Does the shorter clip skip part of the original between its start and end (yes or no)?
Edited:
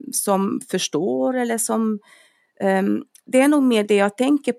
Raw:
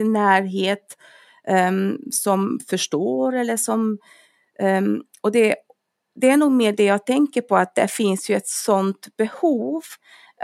yes